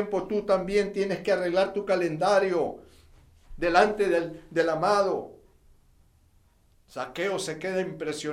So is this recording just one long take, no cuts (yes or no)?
no